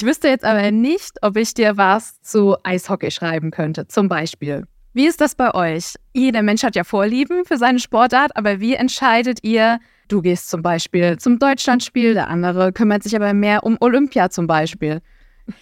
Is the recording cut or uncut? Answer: uncut